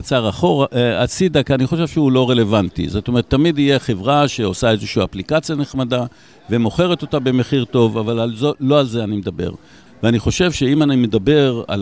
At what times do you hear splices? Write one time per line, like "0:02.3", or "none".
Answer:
0:09.9